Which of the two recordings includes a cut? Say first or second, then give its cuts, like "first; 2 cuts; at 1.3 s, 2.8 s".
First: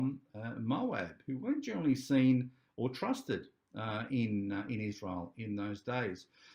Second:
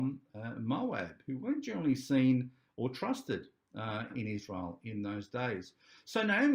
second; 1 cut; at 4.1 s